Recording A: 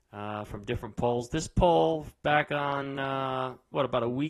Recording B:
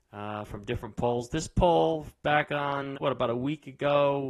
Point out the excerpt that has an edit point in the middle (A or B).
B